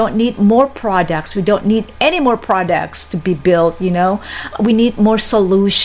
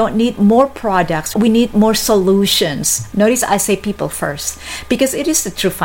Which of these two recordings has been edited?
second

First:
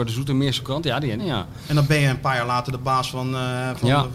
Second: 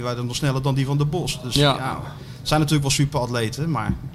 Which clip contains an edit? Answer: first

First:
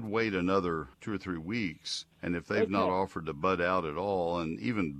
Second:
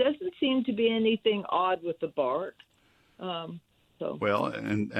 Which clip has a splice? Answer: first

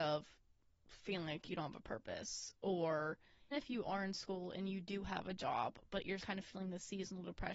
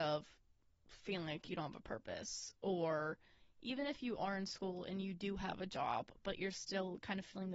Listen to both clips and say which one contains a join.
first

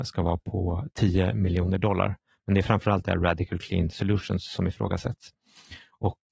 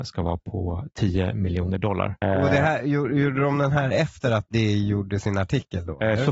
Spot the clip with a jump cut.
second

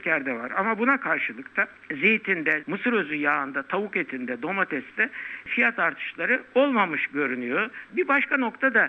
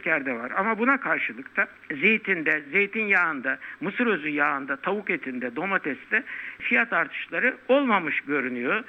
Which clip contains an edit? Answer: first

